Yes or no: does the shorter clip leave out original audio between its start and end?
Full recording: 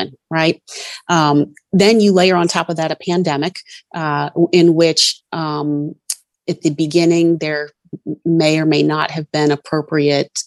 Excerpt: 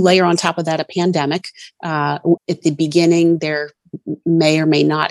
yes